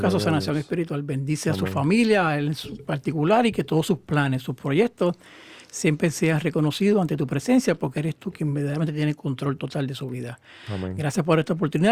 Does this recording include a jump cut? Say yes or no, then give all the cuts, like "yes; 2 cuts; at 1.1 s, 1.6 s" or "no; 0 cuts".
no; 0 cuts